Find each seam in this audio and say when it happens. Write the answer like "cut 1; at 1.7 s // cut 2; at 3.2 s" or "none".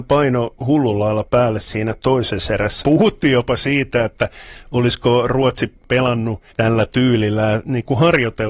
cut 1; at 2.8 s // cut 2; at 6.5 s